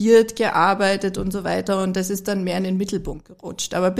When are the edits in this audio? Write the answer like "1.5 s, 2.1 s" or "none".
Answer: none